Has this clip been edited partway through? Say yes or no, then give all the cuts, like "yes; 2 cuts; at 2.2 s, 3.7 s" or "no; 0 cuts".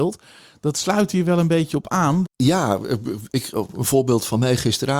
yes; 1 cut; at 2.2 s